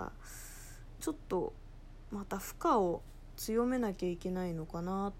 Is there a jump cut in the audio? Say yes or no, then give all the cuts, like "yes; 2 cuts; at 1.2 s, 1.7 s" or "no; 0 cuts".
yes; 1 cut; at 1.0 s